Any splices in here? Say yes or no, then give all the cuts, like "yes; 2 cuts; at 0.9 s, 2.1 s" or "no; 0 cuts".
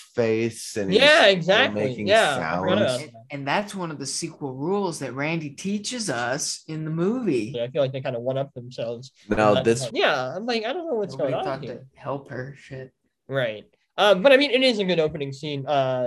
yes; 2 cuts; at 7.5 s, 9.9 s